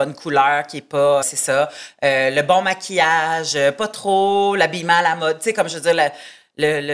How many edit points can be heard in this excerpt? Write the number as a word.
one